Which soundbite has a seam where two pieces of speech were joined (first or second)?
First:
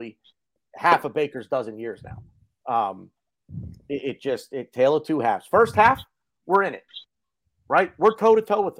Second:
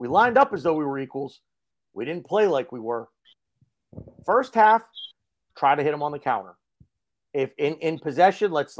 second